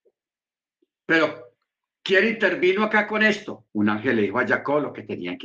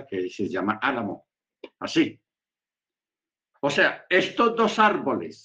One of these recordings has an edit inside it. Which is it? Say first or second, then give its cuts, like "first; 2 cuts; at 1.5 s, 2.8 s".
first; 1 cut; at 3.7 s